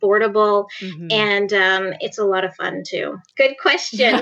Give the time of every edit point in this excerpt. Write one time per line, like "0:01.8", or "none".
0:03.3